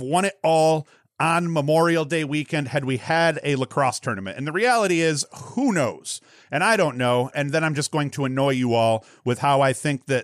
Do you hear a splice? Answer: yes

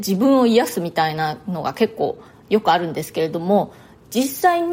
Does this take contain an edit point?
no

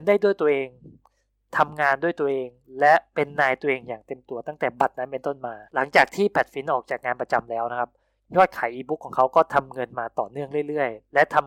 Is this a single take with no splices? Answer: no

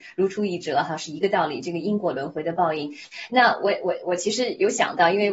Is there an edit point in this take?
no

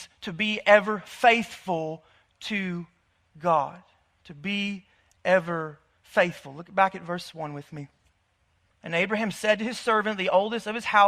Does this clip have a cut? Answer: yes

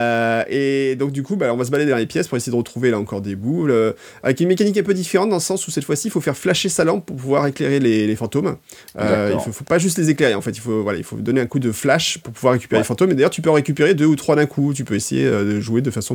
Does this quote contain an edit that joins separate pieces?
no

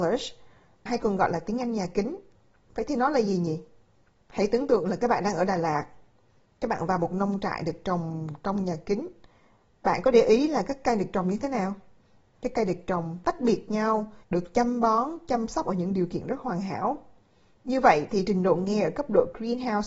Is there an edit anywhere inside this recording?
yes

